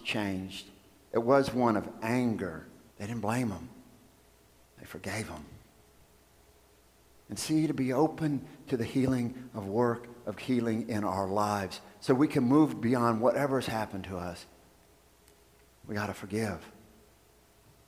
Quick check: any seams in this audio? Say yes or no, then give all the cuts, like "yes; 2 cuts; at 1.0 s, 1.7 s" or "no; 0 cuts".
yes; 1 cut; at 2.9 s